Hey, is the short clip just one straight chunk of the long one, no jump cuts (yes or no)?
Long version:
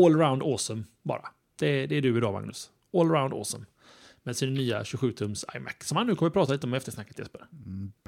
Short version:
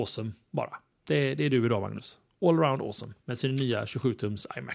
no